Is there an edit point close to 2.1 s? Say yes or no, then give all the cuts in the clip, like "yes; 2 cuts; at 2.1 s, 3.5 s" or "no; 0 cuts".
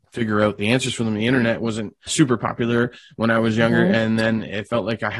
yes; 1 cut; at 2.1 s